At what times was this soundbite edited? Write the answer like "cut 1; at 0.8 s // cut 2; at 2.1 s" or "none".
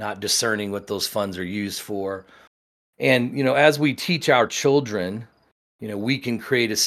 none